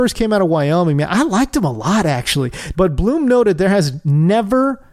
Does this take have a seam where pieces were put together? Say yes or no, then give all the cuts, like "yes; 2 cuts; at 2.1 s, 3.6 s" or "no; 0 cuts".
yes; 1 cut; at 2.7 s